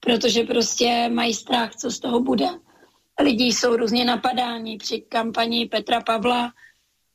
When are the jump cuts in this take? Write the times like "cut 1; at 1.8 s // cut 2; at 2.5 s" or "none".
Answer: none